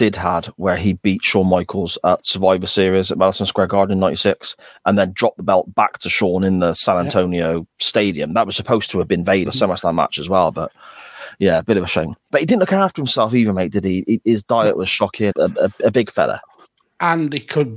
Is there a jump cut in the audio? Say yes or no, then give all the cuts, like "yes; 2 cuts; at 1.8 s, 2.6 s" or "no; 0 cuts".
yes; 2 cuts; at 9.5 s, 15.3 s